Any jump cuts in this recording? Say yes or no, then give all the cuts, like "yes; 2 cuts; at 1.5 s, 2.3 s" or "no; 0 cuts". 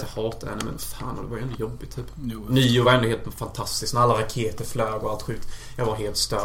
no; 0 cuts